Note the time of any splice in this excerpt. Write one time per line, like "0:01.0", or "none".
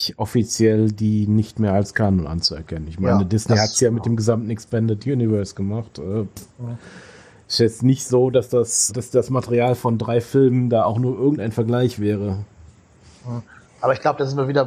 0:08.9